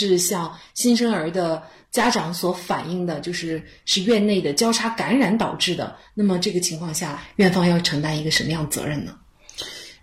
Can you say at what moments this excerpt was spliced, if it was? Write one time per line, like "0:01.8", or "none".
none